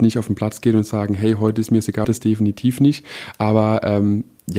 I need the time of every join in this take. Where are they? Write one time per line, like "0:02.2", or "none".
0:02.0